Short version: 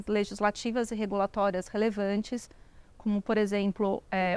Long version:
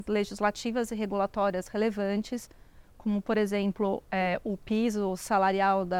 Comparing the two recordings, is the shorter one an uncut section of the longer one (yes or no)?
yes